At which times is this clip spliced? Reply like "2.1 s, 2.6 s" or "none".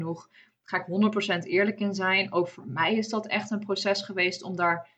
none